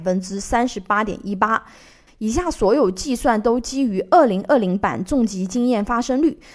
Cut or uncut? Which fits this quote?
cut